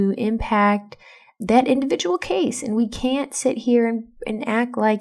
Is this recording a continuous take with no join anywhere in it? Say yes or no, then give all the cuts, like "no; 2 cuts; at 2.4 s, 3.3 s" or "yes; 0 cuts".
yes; 0 cuts